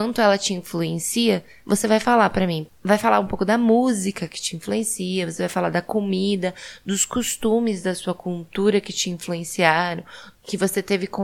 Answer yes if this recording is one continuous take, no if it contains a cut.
yes